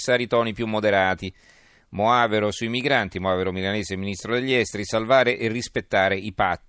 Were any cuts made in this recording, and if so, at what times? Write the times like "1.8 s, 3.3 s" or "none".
none